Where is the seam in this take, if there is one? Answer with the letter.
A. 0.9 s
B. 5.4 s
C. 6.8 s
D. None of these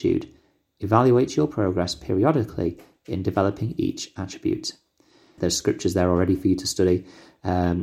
B